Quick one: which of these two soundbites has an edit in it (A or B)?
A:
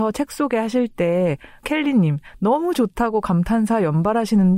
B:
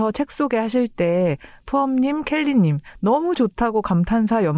A